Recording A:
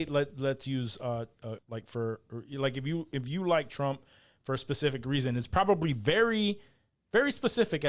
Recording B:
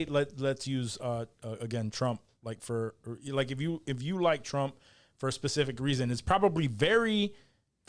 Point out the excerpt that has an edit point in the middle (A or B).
A